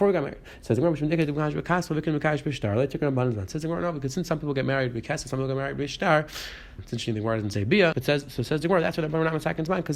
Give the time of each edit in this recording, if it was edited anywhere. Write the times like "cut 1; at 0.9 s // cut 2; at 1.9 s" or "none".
cut 1; at 6.8 s // cut 2; at 7.9 s